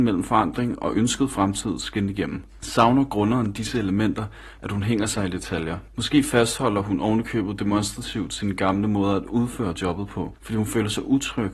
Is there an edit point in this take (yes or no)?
yes